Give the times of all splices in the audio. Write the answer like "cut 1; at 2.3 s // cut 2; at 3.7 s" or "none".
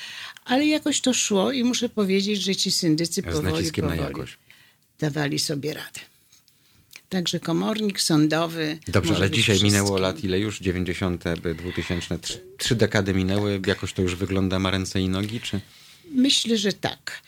none